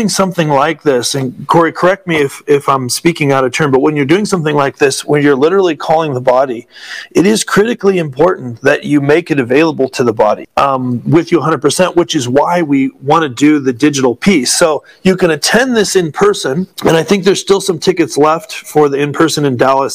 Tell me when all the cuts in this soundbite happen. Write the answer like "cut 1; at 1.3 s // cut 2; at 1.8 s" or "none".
cut 1; at 10.4 s // cut 2; at 16.7 s